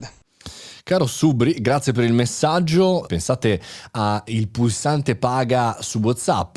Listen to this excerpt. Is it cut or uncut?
cut